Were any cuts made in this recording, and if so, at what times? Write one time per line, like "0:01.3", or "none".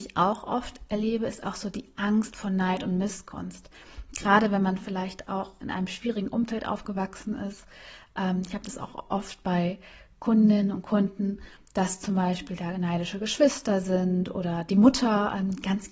0:05.6

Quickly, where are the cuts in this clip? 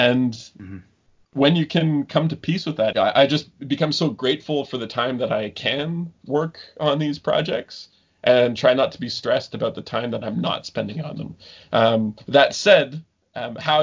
0:02.9

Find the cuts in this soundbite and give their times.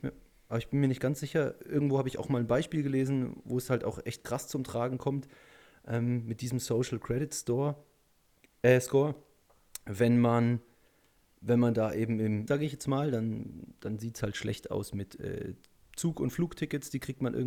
0:12.5

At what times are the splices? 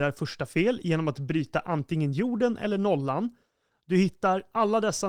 0:03.7

